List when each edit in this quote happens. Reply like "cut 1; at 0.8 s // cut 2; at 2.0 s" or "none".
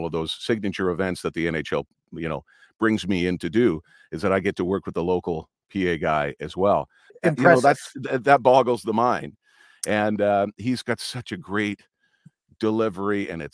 cut 1; at 7.1 s